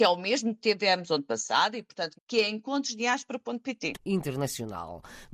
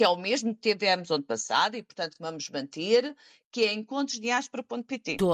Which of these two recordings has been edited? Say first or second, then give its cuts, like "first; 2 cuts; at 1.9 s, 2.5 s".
first; 2 cuts; at 2.2 s, 3.9 s